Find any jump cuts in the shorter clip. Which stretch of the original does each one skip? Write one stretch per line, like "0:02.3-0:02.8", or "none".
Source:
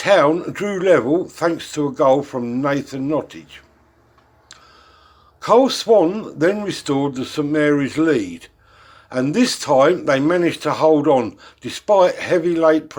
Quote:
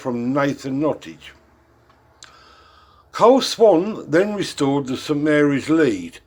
none